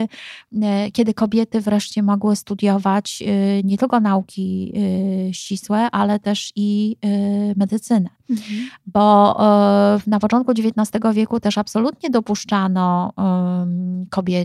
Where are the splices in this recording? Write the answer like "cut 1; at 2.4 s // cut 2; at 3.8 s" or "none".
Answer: none